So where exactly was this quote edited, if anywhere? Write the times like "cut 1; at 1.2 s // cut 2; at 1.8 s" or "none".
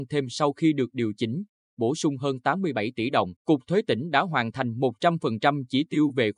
cut 1; at 3.4 s